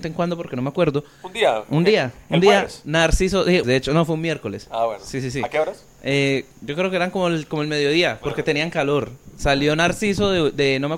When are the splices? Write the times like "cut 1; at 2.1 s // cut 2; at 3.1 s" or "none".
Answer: cut 1; at 3.6 s